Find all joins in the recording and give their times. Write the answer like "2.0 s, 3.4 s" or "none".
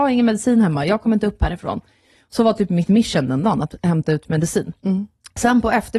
none